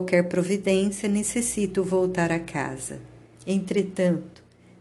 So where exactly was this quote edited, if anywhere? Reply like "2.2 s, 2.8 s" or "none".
3.4 s